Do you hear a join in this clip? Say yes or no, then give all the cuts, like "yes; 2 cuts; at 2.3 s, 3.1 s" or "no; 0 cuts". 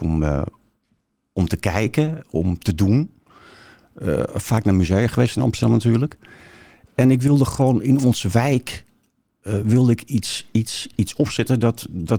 no; 0 cuts